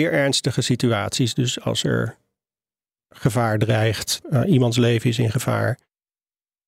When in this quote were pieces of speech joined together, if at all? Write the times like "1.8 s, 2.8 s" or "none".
4.2 s